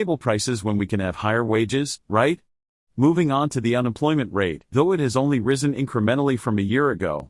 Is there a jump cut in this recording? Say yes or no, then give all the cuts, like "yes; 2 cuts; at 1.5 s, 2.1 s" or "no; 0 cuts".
yes; 1 cut; at 4.7 s